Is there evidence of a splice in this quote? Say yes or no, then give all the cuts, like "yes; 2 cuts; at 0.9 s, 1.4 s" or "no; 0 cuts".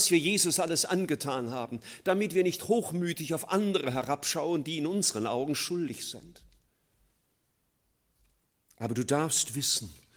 no; 0 cuts